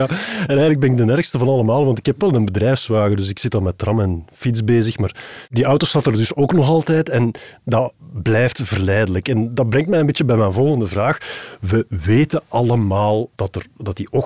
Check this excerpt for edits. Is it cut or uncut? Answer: uncut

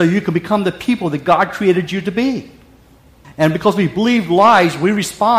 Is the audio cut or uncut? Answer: cut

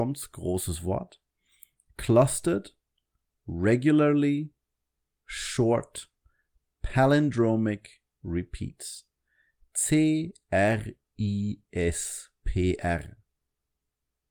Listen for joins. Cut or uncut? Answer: cut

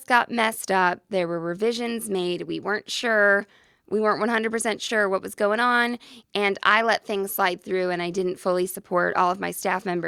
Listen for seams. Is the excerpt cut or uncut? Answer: uncut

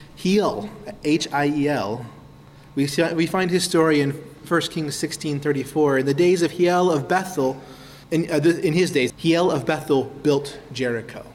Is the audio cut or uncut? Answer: cut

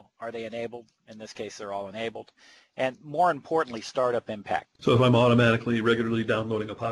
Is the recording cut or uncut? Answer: cut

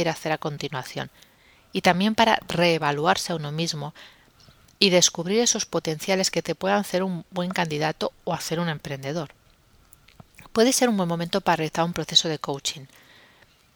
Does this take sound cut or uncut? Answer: uncut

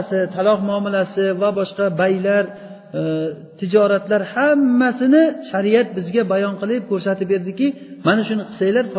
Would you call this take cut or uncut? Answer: cut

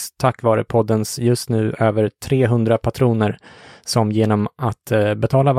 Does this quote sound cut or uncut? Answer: uncut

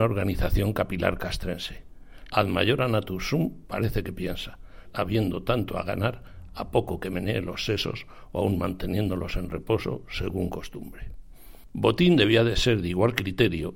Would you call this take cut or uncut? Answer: cut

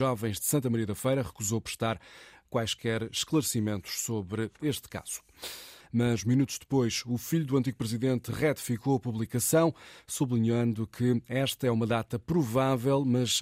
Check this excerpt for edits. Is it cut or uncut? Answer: cut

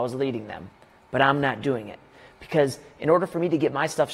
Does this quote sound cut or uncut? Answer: uncut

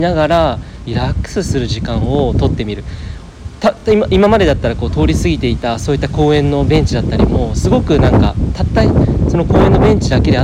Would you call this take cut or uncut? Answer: uncut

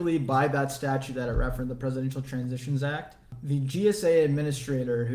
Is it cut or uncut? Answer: uncut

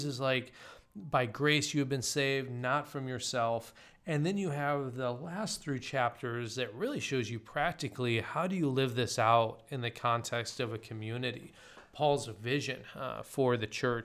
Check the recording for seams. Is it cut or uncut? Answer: uncut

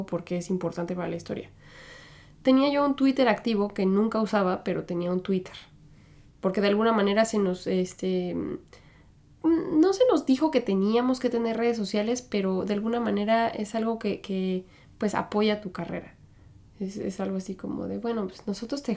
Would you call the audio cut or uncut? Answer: uncut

